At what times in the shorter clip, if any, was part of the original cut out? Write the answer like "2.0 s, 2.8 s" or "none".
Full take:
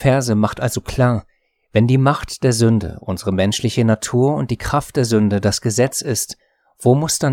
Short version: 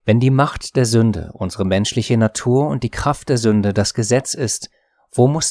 none